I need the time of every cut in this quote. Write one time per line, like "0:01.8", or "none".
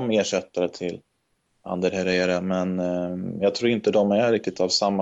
none